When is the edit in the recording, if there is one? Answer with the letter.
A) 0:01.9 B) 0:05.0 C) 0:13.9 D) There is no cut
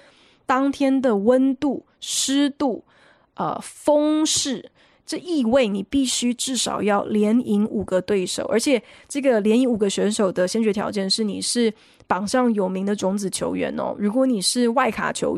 B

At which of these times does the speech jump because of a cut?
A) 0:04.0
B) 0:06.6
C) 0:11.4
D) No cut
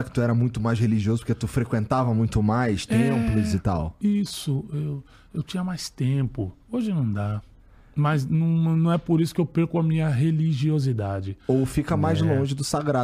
B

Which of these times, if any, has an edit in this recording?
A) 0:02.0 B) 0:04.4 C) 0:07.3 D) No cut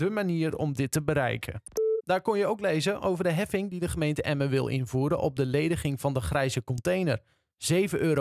A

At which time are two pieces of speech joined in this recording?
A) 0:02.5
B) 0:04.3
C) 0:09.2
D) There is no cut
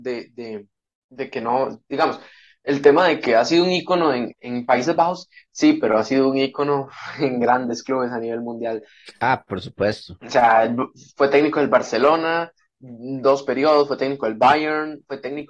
B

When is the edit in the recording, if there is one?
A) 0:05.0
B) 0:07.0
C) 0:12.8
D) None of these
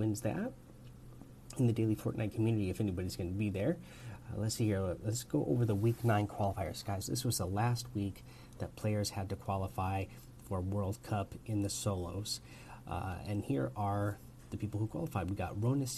B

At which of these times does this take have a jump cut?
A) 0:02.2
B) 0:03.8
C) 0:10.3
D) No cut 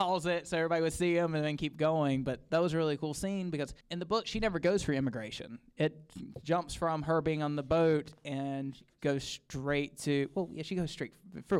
B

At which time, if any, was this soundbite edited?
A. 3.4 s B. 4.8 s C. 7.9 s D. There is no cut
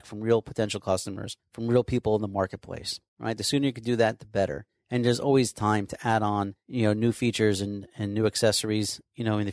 D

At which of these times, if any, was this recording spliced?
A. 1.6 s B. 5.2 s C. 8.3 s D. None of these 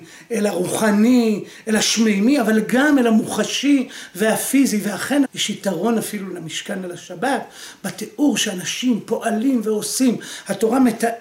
B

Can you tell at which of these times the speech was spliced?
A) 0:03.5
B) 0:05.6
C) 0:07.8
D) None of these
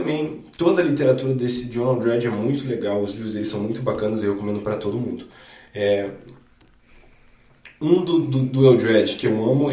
D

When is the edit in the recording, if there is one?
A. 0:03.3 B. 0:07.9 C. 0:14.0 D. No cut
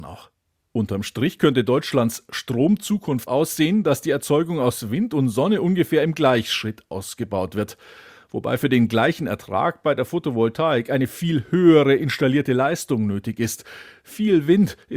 A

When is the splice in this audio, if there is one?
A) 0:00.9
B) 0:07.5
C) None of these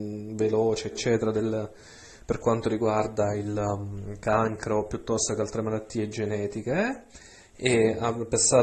A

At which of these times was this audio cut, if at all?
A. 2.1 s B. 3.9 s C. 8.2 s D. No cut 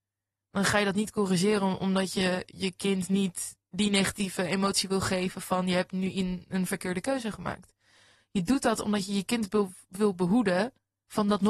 D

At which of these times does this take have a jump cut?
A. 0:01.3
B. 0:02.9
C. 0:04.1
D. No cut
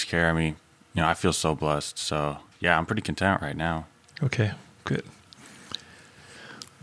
D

